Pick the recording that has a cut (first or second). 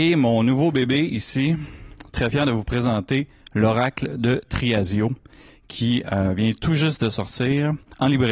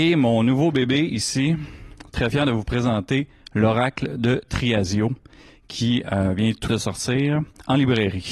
second